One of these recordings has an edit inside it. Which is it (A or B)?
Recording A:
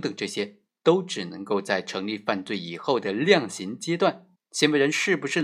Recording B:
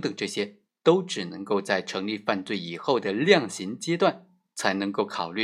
A